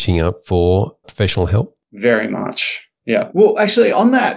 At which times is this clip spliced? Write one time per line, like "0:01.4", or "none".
0:01.0
0:03.3